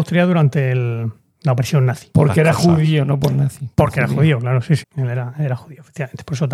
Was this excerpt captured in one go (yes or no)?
no